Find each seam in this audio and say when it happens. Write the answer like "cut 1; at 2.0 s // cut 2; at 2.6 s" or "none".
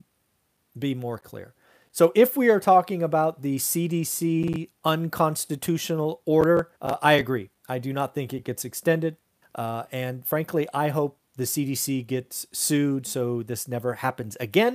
cut 1; at 6.8 s // cut 2; at 9.4 s